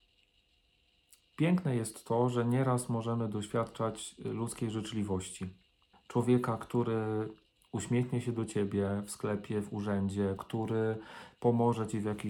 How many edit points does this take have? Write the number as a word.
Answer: two